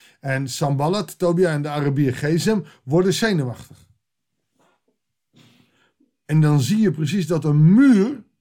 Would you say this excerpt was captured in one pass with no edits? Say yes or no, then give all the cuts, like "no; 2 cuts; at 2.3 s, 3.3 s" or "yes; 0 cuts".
yes; 0 cuts